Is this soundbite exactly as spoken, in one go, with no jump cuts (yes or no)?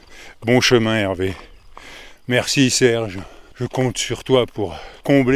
yes